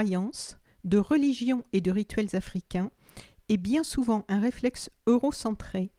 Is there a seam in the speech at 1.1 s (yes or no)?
no